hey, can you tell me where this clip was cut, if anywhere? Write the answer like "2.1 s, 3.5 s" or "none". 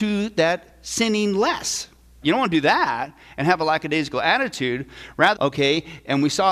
2.2 s, 5.3 s